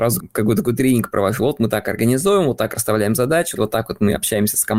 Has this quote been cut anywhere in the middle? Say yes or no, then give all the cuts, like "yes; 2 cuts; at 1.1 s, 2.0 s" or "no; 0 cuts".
yes; 1 cut; at 3.6 s